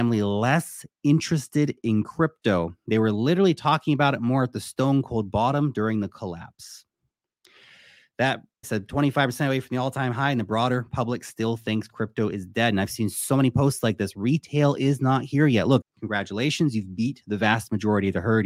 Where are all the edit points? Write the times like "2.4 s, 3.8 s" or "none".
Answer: 8.6 s, 15.8 s